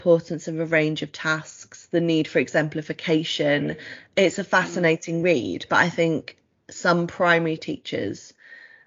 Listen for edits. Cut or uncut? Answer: uncut